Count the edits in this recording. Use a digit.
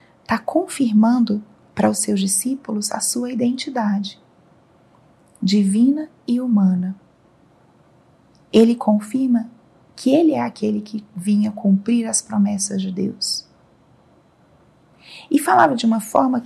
0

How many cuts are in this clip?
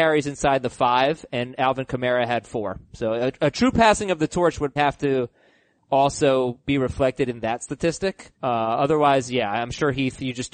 2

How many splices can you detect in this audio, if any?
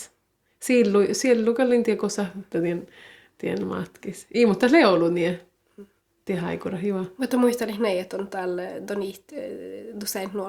1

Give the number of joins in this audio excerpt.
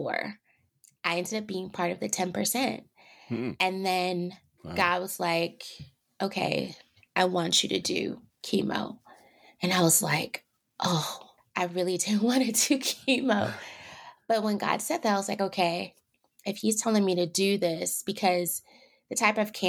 0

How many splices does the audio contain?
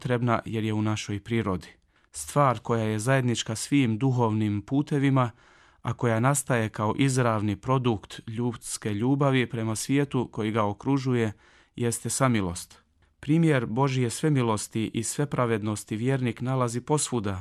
0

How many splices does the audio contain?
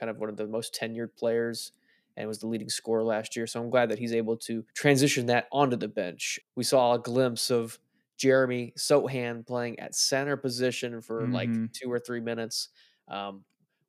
2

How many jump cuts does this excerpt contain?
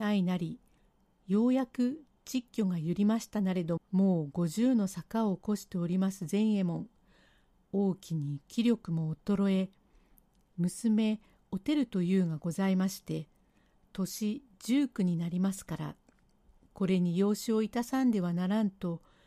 1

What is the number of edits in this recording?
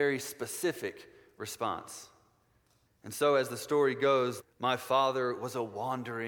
2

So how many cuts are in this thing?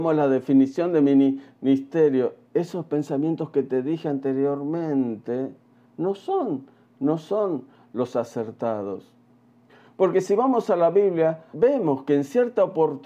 1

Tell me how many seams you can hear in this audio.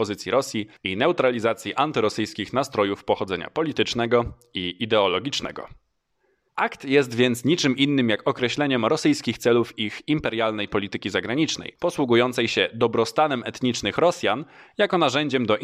1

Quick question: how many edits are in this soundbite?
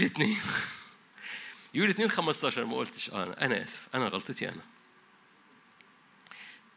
0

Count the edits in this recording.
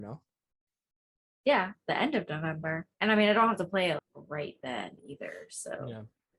2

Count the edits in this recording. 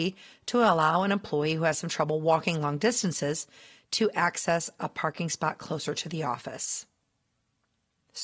0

